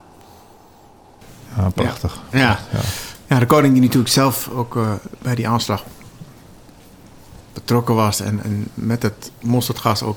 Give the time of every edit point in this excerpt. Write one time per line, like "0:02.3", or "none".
0:08.4